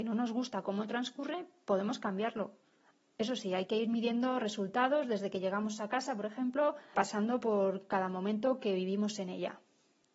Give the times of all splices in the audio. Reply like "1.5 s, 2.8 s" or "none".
6.9 s